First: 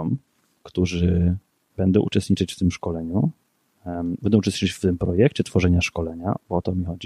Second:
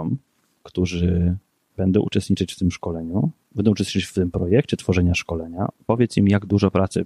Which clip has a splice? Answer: second; 2 cuts; at 3.5 s, 5.8 s

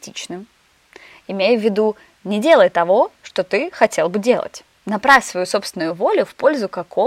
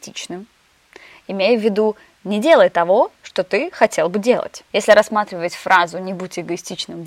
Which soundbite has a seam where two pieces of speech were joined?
second; 1 cut; at 4.7 s

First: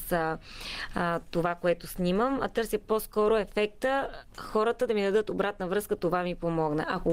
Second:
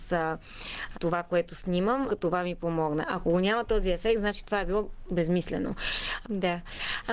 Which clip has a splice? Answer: second; 3 cuts; at 0.9 s, 2.1 s, 6.2 s

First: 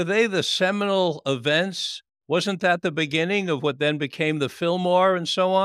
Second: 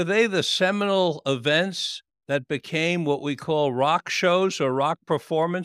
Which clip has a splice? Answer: first; 1 cut; at 2.1 s

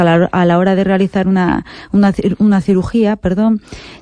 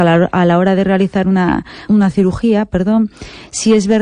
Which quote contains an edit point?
second; 1 cut; at 1.9 s

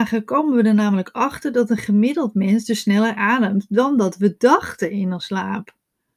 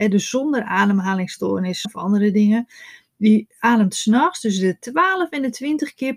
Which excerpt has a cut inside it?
second; 1 cut; at 1.8 s

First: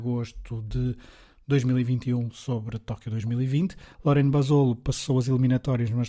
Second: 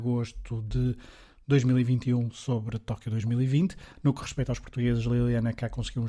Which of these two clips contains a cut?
first; 1 cut; at 3.9 s

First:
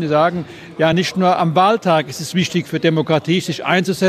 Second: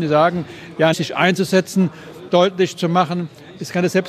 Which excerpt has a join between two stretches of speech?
second; 2 cuts; at 0.9 s, 2.3 s

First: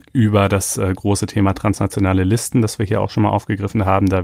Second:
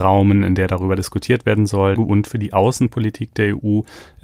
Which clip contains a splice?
second; 1 cut; at 2.0 s

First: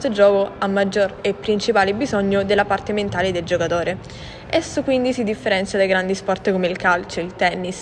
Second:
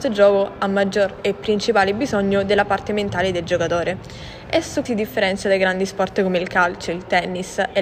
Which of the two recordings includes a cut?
second; 1 cut; at 4.8 s

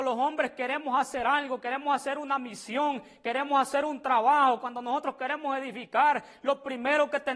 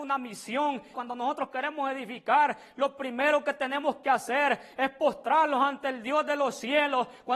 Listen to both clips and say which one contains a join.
second; 1 cut; at 0.9 s

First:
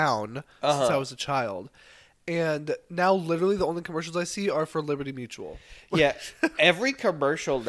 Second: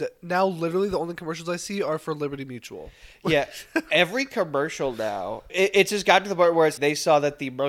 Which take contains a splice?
second; 2 cuts; at 5.5 s, 6.8 s

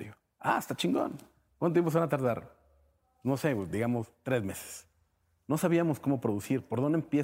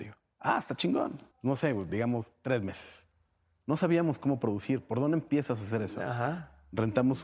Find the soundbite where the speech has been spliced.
second; 1 cut; at 1.3 s

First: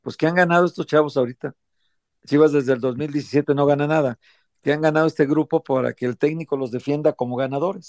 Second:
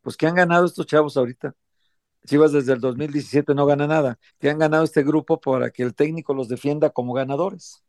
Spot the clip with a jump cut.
second; 1 cut; at 4.3 s

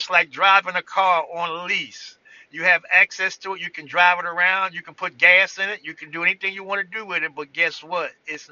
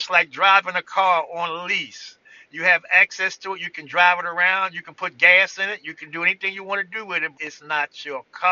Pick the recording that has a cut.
second; 1 cut; at 7.3 s

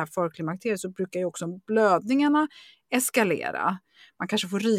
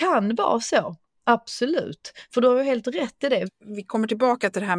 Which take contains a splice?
second; 1 cut; at 3.5 s

